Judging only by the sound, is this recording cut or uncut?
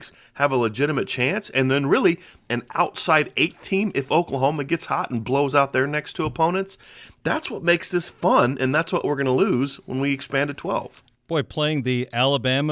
uncut